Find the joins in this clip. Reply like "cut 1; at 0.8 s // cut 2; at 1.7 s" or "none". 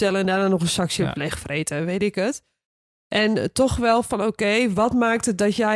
none